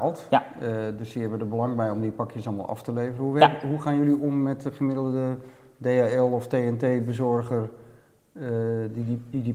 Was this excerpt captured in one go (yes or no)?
yes